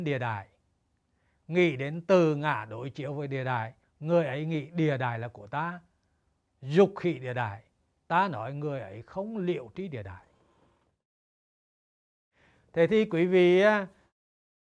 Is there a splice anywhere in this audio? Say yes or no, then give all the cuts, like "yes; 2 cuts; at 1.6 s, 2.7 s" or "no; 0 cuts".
yes; 2 cuts; at 3.8 s, 8.0 s